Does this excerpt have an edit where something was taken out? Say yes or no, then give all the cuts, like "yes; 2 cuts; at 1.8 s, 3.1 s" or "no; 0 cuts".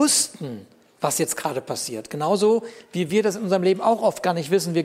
no; 0 cuts